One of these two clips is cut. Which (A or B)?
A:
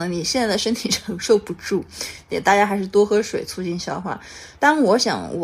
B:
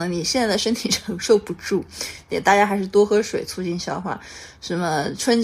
A